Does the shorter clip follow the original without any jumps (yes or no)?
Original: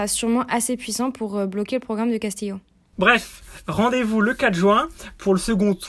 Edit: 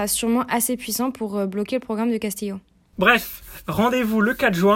yes